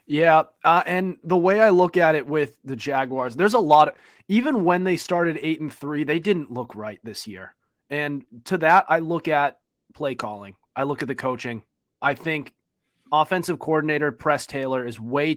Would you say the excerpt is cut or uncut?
uncut